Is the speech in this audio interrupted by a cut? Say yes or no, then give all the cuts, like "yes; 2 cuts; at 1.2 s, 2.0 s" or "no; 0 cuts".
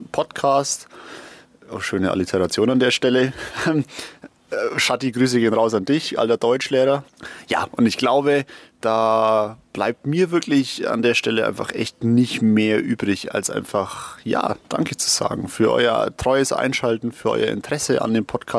no; 0 cuts